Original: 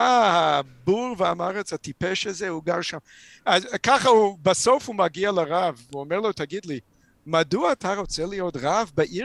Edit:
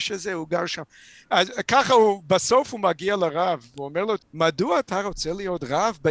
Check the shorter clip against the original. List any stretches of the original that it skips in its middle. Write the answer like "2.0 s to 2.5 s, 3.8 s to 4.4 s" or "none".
6.3 s to 7.1 s